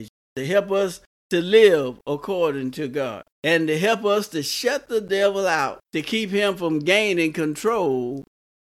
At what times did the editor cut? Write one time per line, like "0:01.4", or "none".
0:03.3
0:05.8